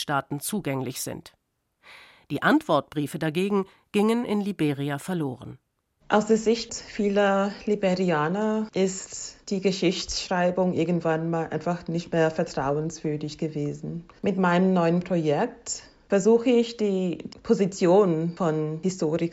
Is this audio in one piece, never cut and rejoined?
no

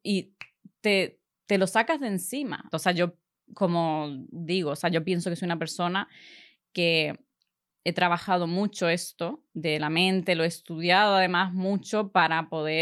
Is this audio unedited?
no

